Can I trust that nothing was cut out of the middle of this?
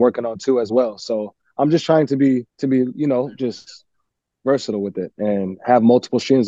no; 2 cuts; at 2.5 s, 4.4 s

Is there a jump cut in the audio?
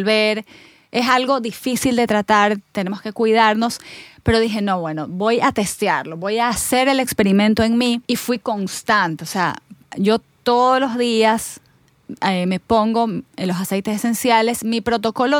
yes; 1 cut; at 8.0 s

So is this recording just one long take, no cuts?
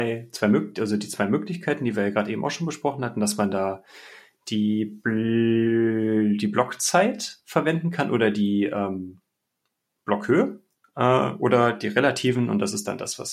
no; 1 cut; at 10.8 s

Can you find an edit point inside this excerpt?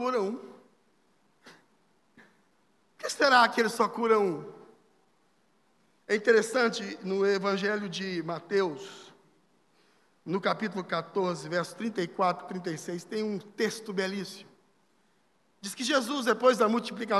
no; 0 cuts

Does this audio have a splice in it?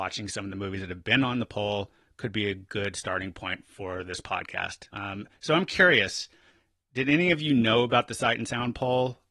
yes; 1 cut; at 4.9 s

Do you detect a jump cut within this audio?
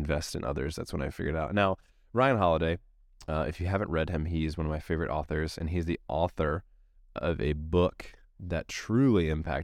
no; 0 cuts

